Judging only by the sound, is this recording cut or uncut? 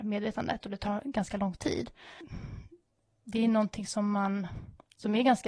uncut